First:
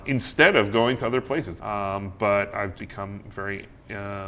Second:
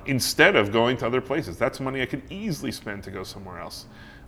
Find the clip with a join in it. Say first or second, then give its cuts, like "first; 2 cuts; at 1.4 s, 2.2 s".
first; 2 cuts; at 1.6 s, 2.8 s